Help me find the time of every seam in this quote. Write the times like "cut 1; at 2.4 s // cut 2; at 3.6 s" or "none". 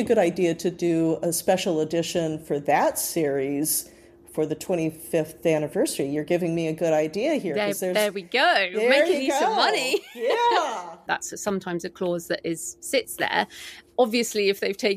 cut 1; at 11.1 s